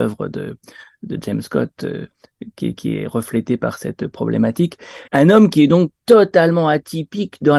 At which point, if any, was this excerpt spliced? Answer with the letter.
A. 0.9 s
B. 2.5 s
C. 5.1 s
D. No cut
C